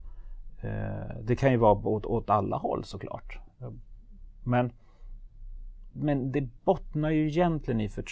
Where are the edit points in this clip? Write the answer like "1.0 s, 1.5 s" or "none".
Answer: 5.9 s